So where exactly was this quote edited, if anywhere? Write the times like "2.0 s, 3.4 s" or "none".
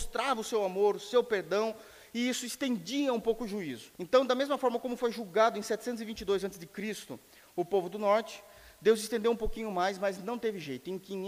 4.0 s